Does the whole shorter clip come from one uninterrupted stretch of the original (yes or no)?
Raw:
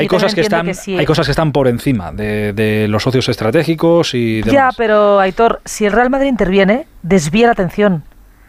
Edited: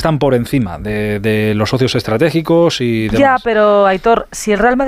yes